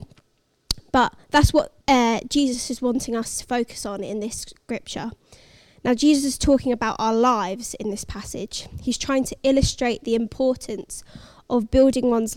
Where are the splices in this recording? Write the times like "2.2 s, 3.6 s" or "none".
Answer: 1.8 s

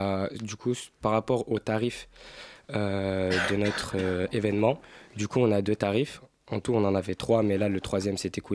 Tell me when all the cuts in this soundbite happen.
none

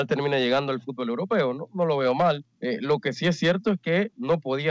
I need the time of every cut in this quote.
2.5 s

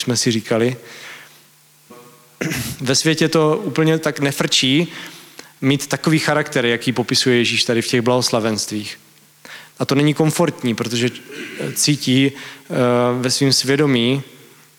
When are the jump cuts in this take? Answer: 1.9 s, 9.7 s

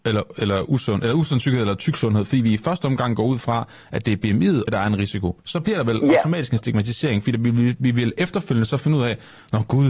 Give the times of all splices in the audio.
4.7 s

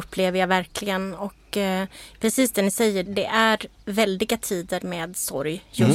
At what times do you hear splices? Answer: 3.0 s

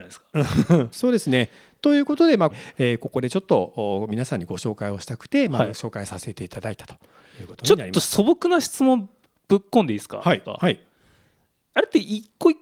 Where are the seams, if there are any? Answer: 0.9 s, 2.5 s, 10.4 s

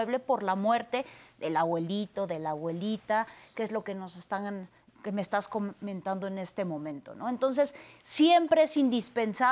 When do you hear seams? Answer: 4.9 s

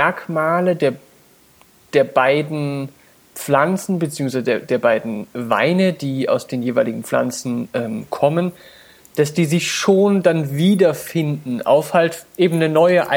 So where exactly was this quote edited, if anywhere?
none

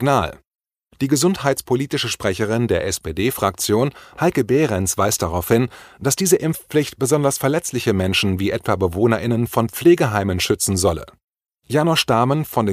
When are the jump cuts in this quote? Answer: none

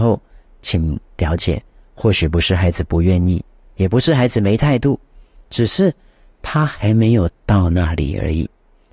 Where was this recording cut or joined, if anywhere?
none

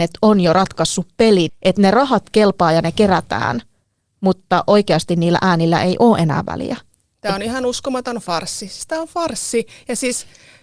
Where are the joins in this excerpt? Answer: 1.5 s

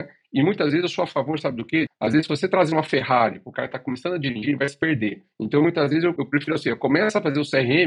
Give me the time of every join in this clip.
1.9 s, 6.2 s

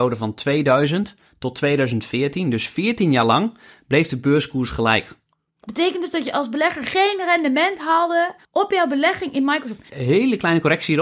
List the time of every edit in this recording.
8.4 s, 9.9 s

